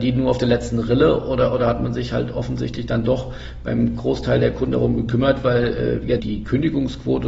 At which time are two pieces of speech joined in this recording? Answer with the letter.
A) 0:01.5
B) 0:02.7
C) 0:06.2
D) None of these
C